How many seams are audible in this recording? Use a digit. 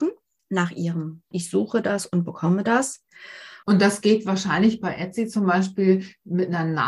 2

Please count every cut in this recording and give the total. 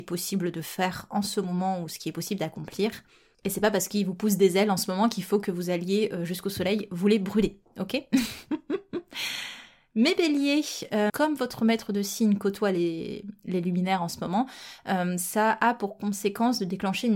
1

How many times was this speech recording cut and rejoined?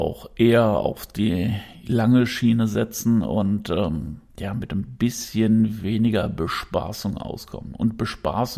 1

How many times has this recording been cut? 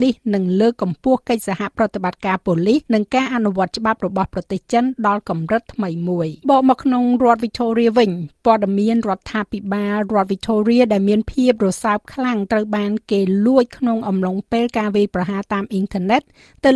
2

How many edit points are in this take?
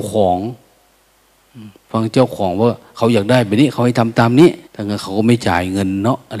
1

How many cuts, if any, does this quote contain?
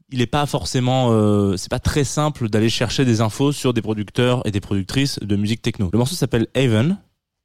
1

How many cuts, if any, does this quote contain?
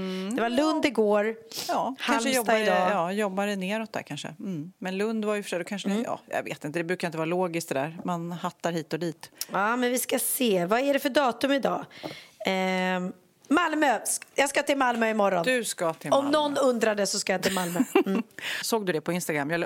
1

